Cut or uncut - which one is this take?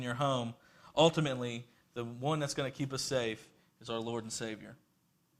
uncut